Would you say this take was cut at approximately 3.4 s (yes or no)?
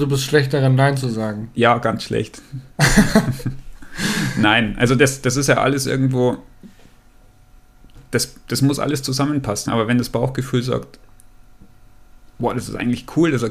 no